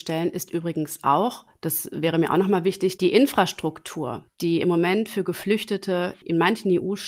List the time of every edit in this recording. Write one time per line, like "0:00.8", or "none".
0:03.0